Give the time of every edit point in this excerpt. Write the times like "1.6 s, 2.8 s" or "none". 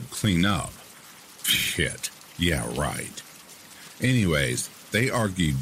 none